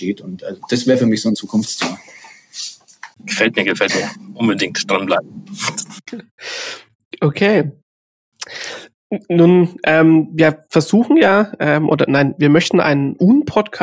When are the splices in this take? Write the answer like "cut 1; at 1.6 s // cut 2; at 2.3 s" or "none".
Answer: cut 1; at 3.1 s